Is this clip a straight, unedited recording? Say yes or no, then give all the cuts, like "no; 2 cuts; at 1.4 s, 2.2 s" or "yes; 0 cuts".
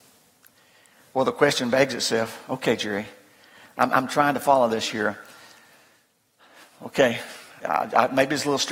no; 1 cut; at 7.6 s